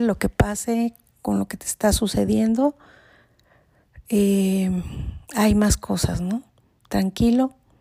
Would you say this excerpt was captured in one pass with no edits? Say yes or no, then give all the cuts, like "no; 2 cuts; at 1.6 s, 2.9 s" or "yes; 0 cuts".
yes; 0 cuts